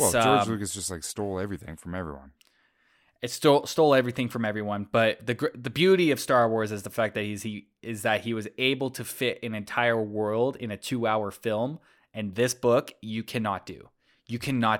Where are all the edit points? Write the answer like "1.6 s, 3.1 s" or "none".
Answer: none